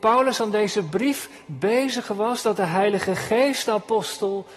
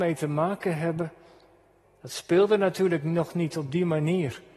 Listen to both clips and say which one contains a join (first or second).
second